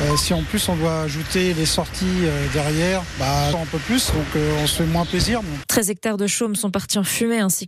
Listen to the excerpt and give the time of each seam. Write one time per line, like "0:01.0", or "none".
0:03.5
0:05.6